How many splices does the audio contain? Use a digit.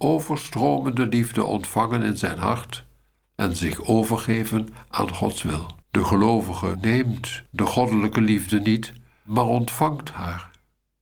1